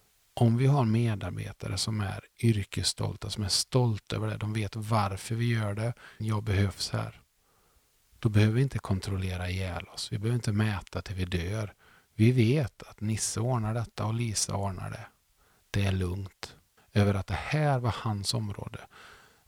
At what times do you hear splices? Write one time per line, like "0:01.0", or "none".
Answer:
0:06.2
0:16.8

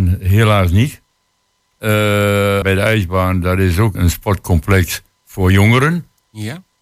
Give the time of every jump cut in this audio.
0:02.6
0:03.9

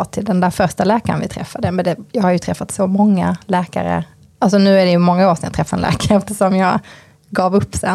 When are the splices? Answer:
none

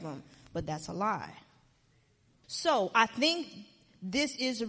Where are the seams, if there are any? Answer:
0:02.4

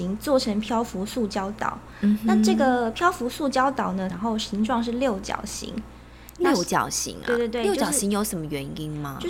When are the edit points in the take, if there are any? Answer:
0:04.1

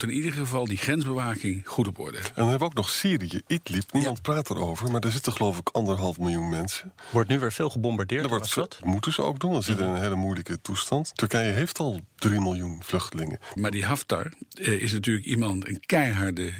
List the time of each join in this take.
0:08.8
0:11.1
0:13.6

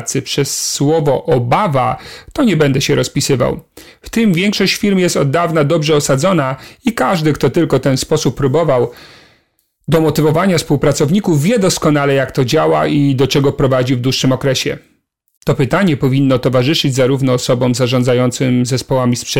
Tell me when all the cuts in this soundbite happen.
0:15.4

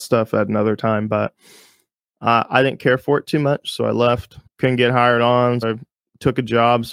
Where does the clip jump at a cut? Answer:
0:04.5
0:05.6

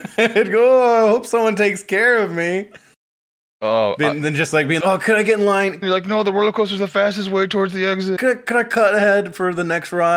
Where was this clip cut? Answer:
0:04.8
0:05.8
0:08.2

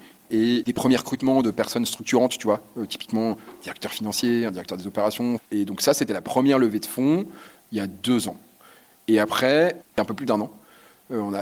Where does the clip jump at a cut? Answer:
0:05.4
0:09.8

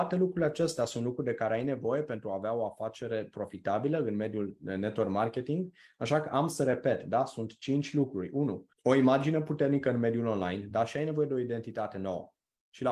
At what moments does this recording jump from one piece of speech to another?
0:08.7

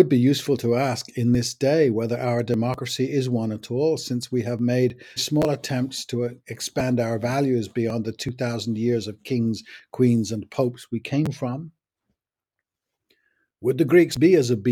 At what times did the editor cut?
0:05.2

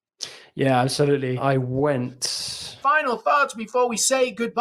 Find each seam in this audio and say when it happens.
0:01.4
0:02.8

